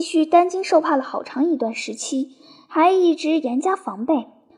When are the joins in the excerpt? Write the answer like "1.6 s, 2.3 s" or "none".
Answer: none

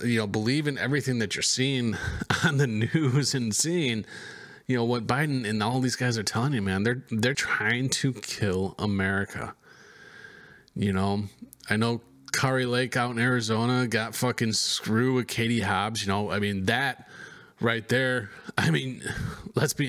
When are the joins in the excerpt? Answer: 7.3 s

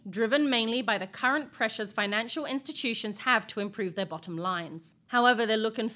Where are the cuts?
5.1 s

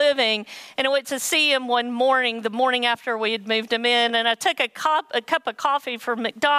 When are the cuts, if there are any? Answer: none

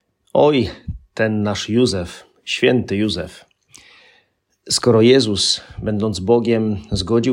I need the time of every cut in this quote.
none

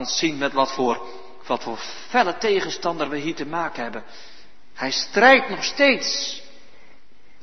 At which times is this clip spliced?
none

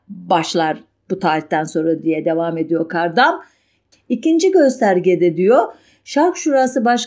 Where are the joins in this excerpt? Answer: 3.9 s

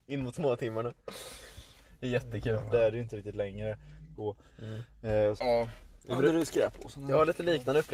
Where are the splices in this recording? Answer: 2.7 s, 4.2 s, 5.4 s

